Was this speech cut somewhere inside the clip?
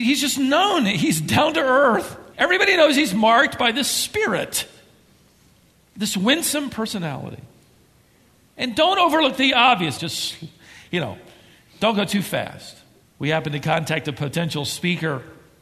yes; 2 cuts; at 10.0 s, 13.0 s

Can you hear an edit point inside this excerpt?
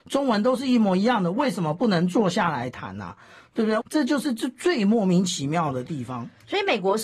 yes; 1 cut; at 3.8 s

